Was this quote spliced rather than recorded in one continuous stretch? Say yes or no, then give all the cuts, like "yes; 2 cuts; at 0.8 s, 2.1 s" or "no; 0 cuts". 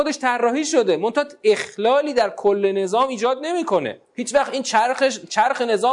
yes; 1 cut; at 4.0 s